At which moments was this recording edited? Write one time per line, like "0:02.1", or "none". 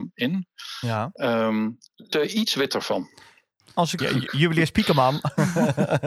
0:02.1
0:04.0